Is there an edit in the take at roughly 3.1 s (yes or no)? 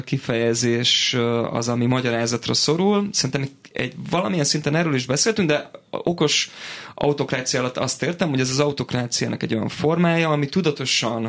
no